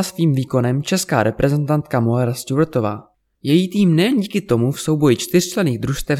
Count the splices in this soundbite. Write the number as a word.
one